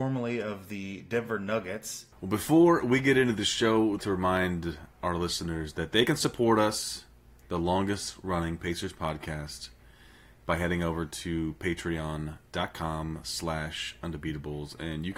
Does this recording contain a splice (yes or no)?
yes